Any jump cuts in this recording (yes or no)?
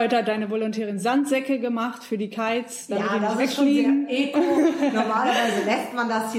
no